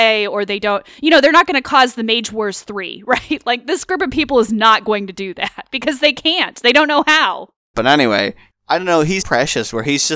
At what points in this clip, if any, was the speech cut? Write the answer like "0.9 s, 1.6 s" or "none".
7.7 s, 9.2 s